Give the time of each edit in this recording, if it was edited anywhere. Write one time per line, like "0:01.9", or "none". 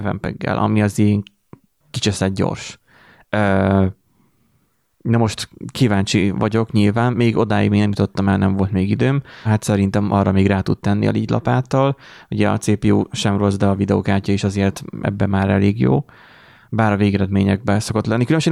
0:09.5

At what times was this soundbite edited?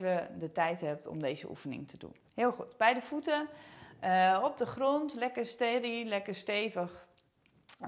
0:02.2

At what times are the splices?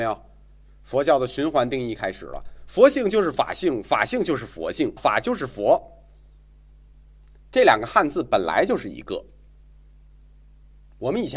0:05.0

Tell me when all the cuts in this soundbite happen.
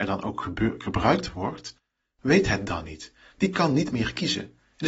none

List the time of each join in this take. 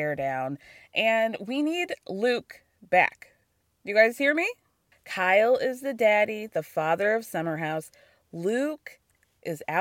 0:04.9

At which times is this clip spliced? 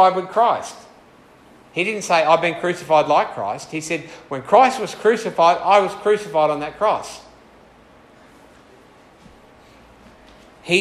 none

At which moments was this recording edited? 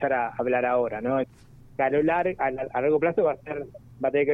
0:01.2

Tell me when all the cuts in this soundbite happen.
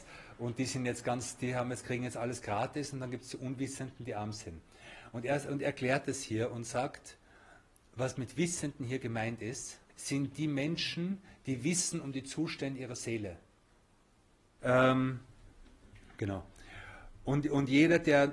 0:09.9
0:14.6

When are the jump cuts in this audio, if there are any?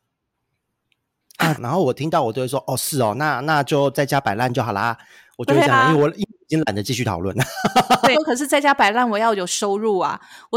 0:01.5
0:08.1

